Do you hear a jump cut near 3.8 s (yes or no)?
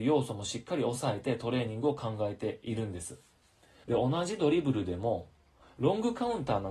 yes